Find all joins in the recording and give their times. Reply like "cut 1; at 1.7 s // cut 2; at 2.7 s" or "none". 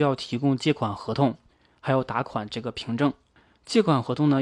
none